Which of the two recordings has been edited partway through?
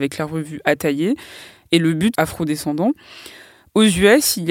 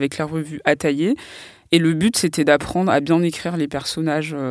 first; 1 cut; at 2.1 s

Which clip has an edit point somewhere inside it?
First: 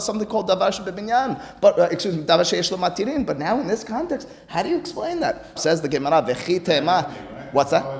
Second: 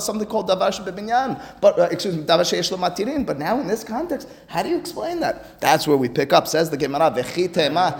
first; 1 cut; at 5.6 s

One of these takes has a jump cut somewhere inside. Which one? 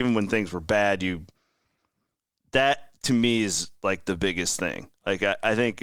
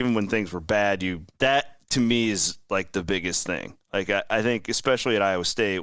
second; 1 cut; at 1.3 s

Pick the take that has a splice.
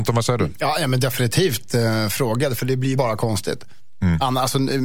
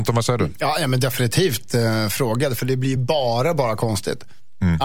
first; 1 cut; at 3.0 s

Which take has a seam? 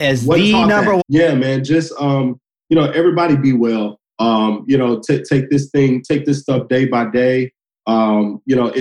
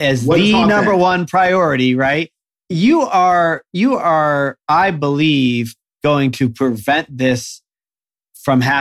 first; 1 cut; at 1.0 s

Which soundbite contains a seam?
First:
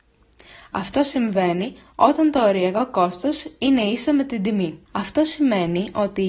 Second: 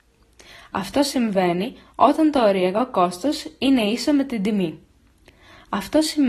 first; 1 cut; at 4.9 s

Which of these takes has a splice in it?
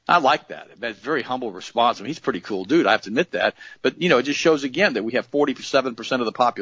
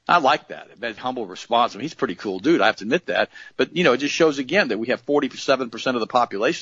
second; 1 cut; at 1.0 s

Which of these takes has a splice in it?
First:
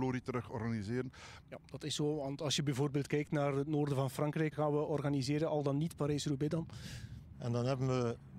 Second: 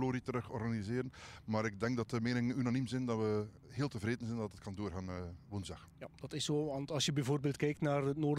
first; 3 cuts; at 1.4 s, 4.5 s, 7.3 s

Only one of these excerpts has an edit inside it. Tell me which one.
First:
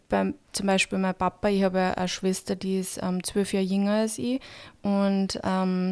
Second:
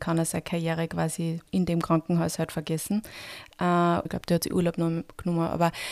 second; 2 cuts; at 1.5 s, 4.1 s

